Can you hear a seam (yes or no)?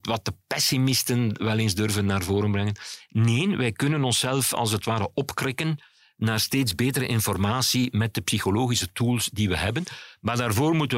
no